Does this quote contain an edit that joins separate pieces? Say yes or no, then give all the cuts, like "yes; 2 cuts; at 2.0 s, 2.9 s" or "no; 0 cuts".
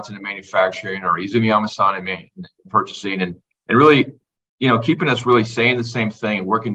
no; 0 cuts